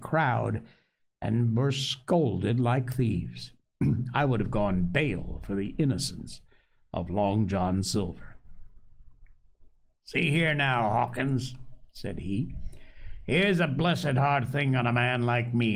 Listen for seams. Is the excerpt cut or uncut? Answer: uncut